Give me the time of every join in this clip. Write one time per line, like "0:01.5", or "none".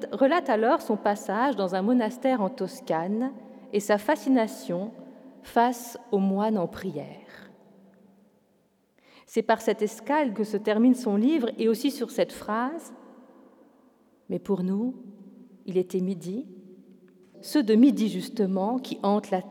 0:10.4
0:17.3